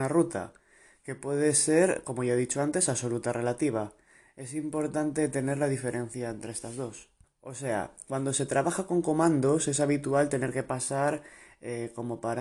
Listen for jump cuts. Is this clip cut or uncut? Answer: cut